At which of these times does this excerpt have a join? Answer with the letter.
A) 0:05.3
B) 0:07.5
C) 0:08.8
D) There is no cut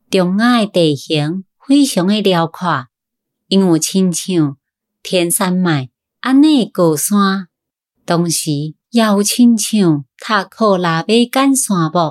A